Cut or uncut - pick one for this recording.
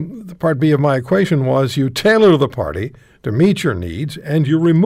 uncut